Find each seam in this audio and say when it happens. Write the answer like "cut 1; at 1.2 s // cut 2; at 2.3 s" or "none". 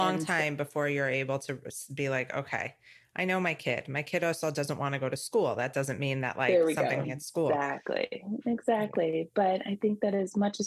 cut 1; at 7.0 s